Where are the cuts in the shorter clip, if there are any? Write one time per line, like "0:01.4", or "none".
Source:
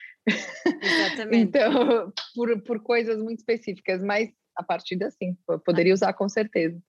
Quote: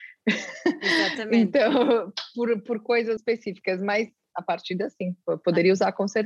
0:03.2